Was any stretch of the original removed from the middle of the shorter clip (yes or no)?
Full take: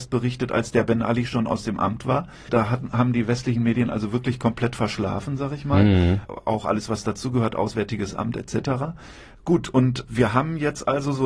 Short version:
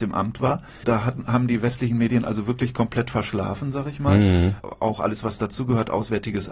no